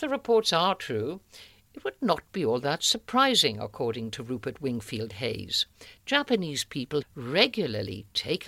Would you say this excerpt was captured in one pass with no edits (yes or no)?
no